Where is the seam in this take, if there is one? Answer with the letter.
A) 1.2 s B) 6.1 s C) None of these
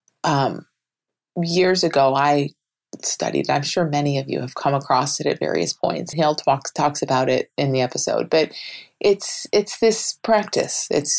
B